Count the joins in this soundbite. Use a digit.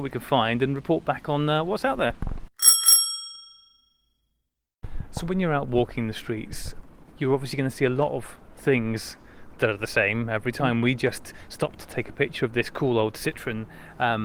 0